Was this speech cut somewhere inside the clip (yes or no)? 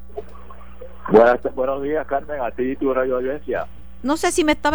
no